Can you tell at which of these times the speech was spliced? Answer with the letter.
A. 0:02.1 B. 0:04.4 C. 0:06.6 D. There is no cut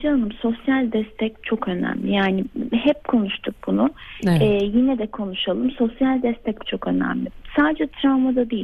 C